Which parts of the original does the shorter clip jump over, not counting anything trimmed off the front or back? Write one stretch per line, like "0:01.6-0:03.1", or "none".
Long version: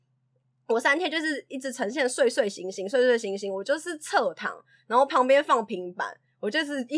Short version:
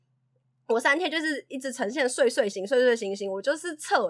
0:02.5-0:02.7